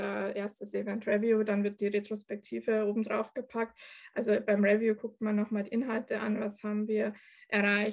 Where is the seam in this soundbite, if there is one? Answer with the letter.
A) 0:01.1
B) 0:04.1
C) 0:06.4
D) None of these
D